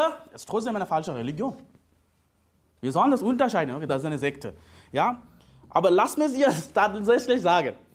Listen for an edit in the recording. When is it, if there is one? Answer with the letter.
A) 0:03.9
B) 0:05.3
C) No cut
A